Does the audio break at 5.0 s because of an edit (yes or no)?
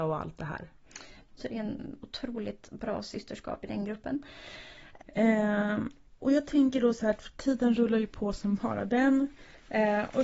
yes